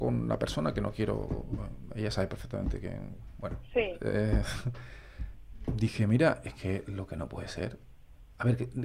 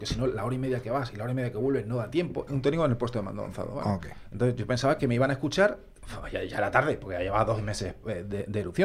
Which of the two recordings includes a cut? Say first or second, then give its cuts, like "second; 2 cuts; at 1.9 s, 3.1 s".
second; 1 cut; at 2.5 s